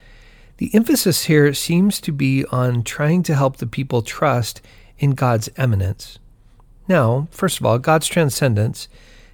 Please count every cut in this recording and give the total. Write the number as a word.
zero